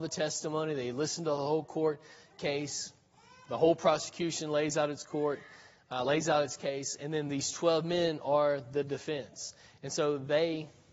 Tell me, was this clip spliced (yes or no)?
no